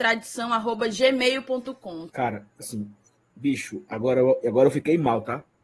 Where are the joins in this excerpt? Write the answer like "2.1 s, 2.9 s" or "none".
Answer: 2.1 s